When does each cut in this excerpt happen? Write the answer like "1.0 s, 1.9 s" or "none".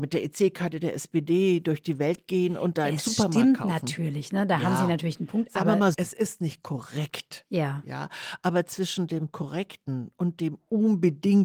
5.9 s